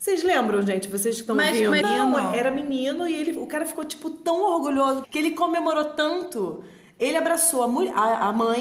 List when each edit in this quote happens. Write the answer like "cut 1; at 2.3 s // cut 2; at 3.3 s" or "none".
cut 1; at 1.8 s // cut 2; at 5.0 s